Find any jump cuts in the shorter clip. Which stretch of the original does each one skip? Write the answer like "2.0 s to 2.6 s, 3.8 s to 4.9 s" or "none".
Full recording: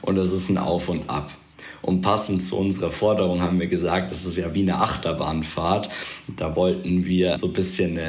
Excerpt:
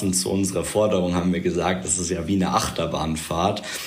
none